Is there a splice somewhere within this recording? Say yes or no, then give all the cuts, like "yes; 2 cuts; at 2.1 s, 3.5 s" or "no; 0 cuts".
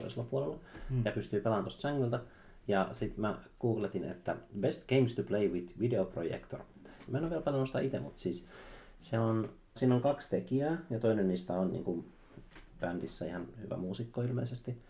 yes; 2 cuts; at 7.1 s, 9.8 s